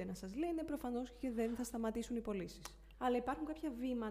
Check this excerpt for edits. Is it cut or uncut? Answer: cut